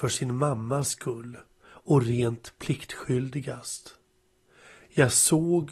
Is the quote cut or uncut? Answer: uncut